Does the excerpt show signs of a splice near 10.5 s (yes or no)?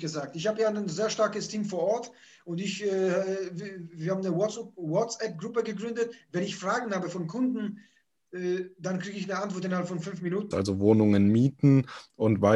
yes